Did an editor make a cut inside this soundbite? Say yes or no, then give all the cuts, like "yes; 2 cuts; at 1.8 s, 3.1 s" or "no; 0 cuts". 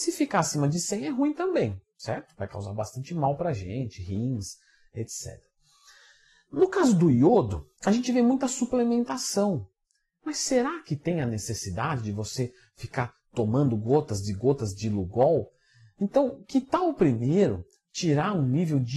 yes; 1 cut; at 7.8 s